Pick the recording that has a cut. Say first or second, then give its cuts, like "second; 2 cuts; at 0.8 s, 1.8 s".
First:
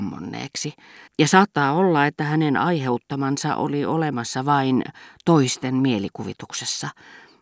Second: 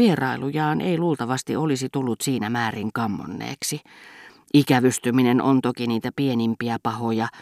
first; 1 cut; at 1.1 s